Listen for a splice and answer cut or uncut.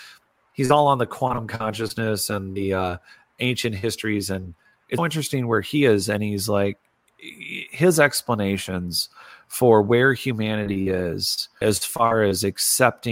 cut